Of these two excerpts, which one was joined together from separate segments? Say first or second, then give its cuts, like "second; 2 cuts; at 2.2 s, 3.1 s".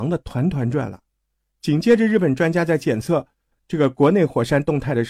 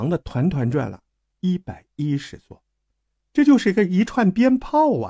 second; 1 cut; at 1.3 s